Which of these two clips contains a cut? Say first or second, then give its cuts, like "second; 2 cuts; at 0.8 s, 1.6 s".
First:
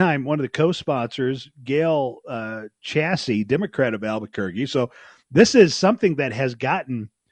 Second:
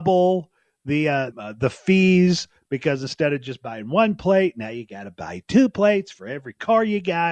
second; 1 cut; at 1.3 s